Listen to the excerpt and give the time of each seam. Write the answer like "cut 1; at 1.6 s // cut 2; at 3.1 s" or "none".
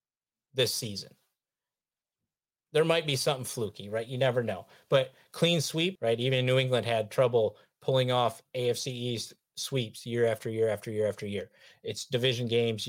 cut 1; at 6.0 s